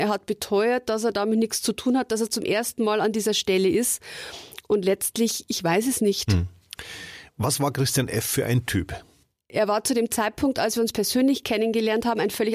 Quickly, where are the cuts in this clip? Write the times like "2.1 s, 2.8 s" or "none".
none